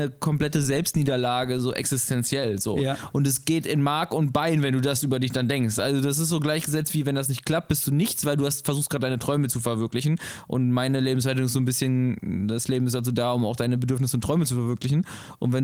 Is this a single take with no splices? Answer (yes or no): yes